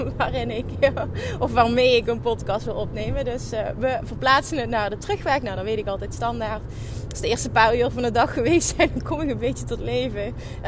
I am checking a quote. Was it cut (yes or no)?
no